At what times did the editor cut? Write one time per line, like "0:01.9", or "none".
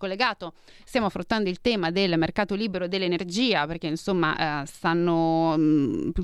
none